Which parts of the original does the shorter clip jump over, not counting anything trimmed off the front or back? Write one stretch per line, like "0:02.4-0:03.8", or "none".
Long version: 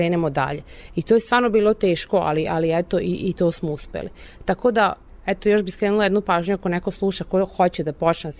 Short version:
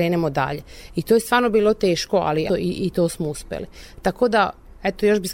0:02.5-0:02.9